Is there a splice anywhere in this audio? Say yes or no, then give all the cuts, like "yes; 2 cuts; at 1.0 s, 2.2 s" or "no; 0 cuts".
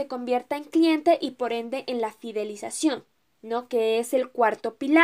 no; 0 cuts